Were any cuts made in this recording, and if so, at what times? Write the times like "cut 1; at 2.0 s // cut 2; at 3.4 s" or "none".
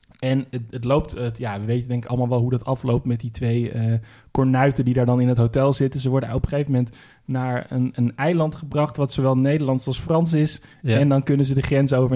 none